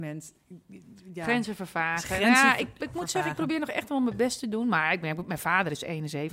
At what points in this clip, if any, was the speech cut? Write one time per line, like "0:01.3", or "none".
none